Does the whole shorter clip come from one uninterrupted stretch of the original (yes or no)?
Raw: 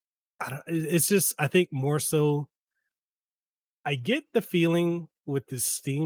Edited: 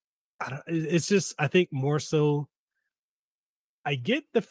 yes